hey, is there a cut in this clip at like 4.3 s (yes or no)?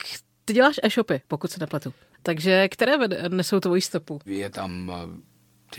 yes